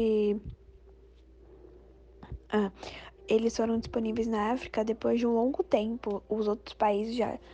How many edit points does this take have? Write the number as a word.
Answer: one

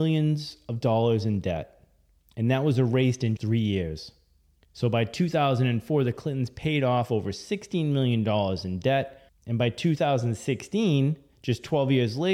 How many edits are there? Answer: one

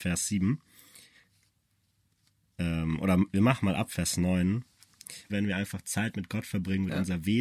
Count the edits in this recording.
one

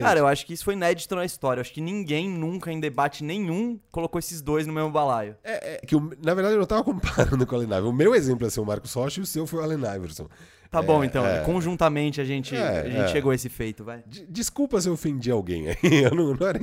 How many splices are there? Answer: one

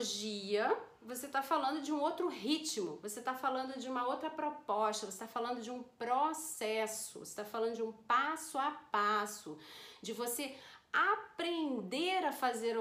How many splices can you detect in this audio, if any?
zero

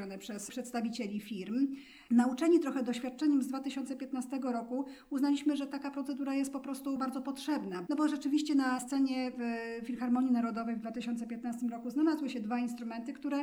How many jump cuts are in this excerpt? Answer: one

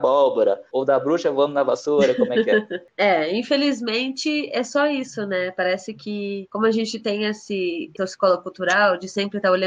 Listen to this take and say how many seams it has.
zero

